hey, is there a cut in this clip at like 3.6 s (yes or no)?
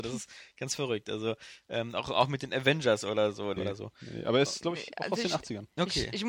yes